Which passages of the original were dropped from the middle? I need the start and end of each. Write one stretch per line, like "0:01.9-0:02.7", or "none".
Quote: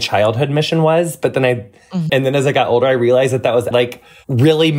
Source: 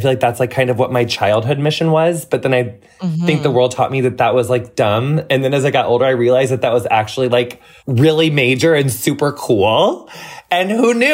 0:03.2-0:05.3
0:06.9-0:07.3